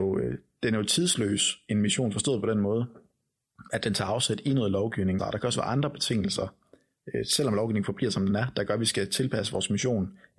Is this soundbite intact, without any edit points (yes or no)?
no